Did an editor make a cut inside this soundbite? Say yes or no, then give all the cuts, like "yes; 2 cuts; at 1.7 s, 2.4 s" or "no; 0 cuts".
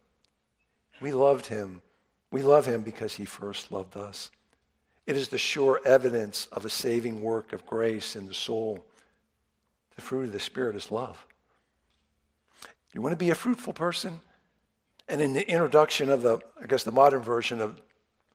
yes; 3 cuts; at 12.7 s, 14.9 s, 16.5 s